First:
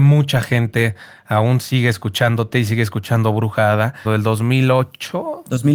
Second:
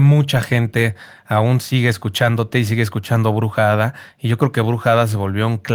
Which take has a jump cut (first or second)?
first